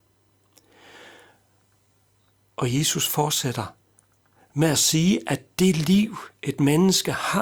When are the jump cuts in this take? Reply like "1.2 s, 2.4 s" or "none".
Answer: none

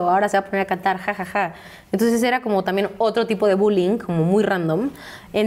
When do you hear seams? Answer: none

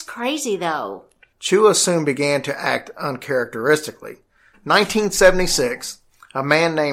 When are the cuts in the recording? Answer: 1.3 s, 4.5 s

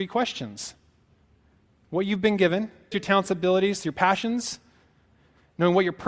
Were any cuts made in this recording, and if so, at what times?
2.9 s

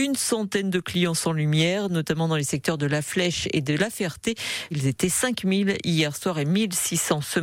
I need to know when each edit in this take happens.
4.7 s

